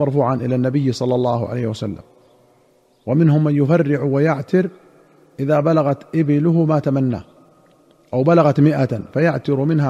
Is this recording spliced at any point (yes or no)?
no